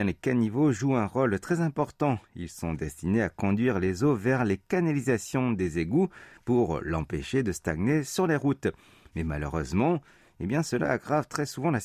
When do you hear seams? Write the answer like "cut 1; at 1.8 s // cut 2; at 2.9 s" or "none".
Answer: cut 1; at 10.3 s